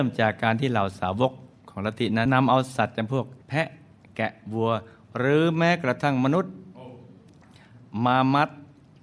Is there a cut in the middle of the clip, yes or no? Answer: yes